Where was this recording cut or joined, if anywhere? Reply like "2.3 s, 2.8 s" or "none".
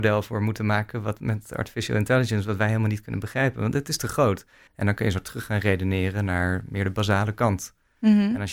4.7 s